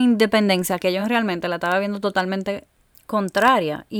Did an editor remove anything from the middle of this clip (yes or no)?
no